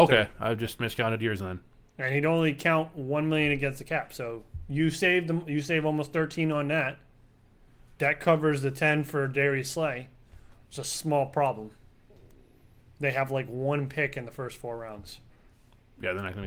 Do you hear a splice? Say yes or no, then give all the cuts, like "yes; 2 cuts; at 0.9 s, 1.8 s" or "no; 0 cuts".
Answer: no; 0 cuts